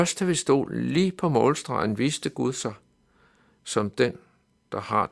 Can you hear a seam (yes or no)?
no